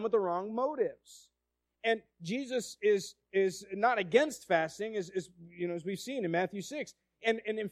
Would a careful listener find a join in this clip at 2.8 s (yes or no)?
no